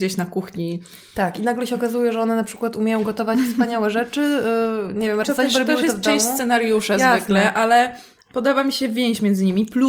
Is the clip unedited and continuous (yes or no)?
no